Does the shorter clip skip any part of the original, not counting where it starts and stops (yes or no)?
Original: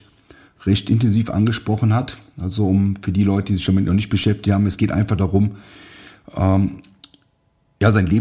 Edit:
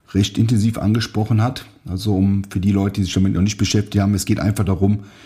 no